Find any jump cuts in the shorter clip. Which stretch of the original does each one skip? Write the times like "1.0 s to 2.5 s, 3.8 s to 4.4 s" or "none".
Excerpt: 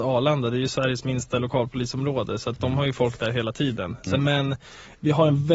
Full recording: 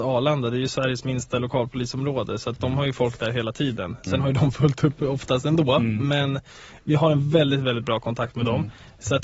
4.2 s to 6.0 s